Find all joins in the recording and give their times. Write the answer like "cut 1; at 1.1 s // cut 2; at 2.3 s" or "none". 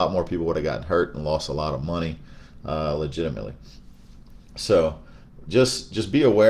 none